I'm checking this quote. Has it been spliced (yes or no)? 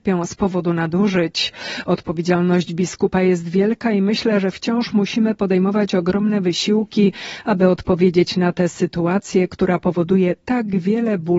no